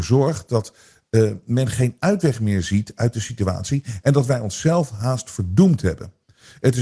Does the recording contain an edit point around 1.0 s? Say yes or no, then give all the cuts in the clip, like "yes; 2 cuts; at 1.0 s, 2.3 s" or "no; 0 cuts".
no; 1 cut; at 4.0 s